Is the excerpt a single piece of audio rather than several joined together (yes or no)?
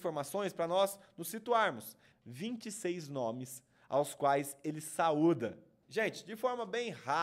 no